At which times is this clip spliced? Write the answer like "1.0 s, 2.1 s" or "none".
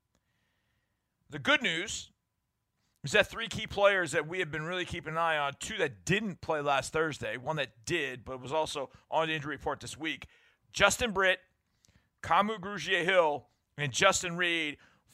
none

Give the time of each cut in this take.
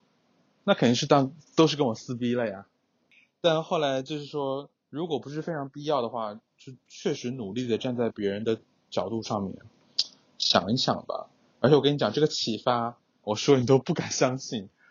13.2 s

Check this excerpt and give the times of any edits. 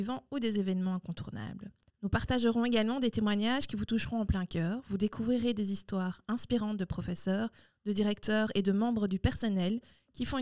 1.9 s

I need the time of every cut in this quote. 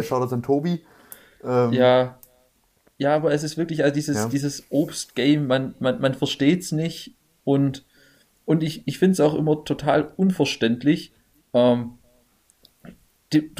none

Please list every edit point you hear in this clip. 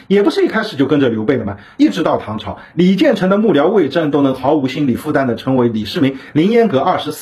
none

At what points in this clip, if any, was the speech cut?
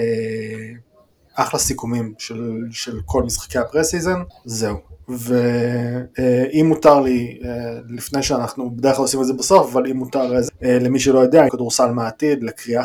4.3 s, 10.5 s, 11.5 s

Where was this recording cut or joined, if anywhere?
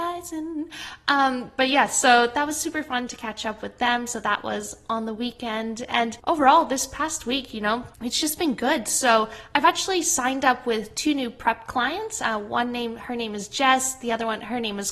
6.2 s, 7.9 s

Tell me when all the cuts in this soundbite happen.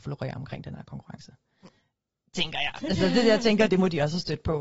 3.7 s

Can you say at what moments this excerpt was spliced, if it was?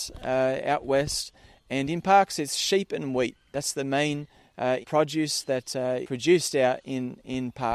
4.8 s, 6.0 s

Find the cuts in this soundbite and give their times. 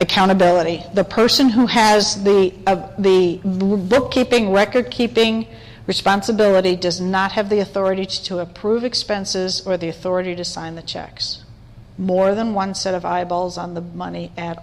none

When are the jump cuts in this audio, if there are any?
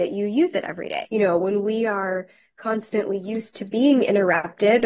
1.0 s

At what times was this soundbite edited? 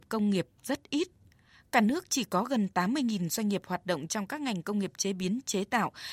none

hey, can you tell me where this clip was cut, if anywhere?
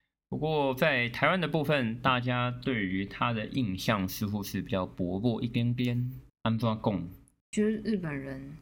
6.3 s

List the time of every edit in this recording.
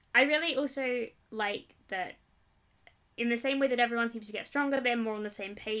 none

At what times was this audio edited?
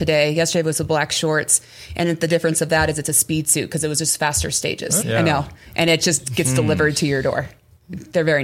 5.0 s

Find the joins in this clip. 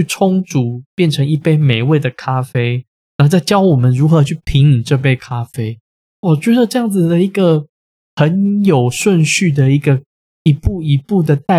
6.1 s

